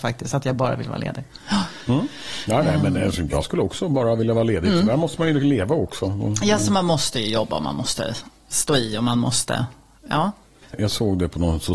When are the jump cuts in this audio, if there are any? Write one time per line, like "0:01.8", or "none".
none